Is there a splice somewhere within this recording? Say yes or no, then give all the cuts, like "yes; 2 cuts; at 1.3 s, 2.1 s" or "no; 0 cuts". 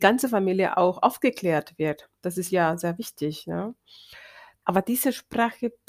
yes; 1 cut; at 4.6 s